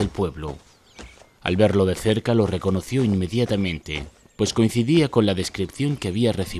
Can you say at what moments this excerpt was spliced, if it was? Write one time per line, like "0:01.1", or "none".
none